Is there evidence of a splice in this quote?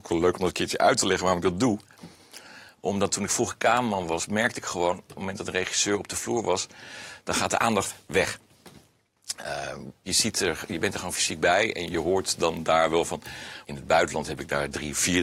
yes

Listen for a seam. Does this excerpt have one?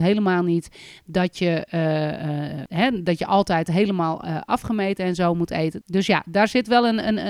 yes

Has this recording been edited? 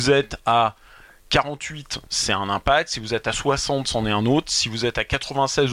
no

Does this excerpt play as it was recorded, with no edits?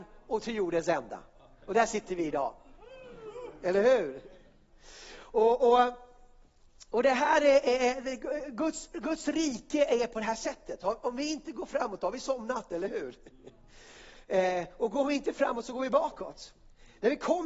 yes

